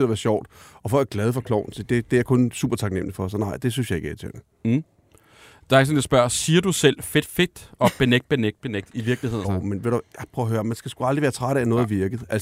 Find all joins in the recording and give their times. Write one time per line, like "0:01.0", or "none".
0:07.3
0:09.4

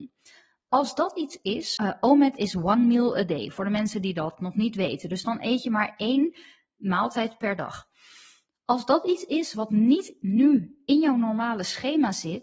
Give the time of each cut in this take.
0:01.8

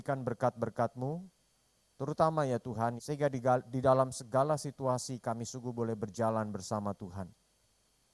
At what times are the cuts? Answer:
0:03.0

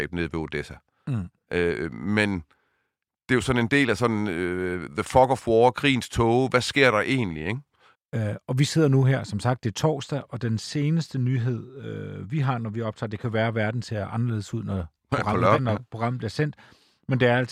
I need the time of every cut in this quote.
0:07.9
0:15.6

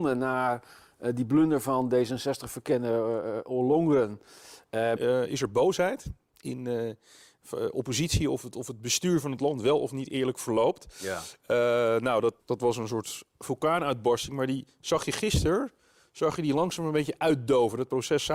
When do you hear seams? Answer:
0:05.0
0:12.4

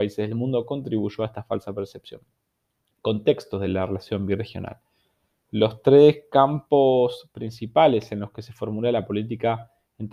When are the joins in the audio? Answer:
none

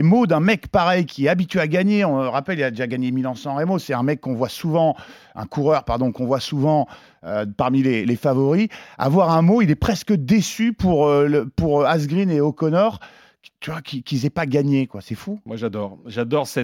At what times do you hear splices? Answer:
none

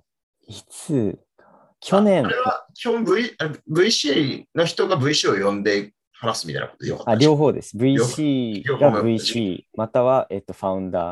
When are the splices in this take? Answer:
none

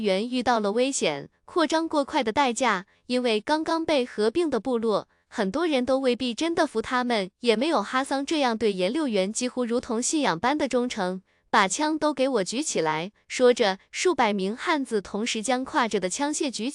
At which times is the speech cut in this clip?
0:02.9
0:13.1

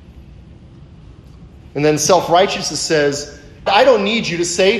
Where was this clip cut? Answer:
0:01.7
0:03.7

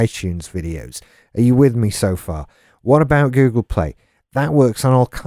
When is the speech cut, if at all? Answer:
none

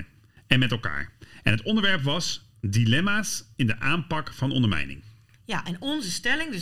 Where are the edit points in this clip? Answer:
none

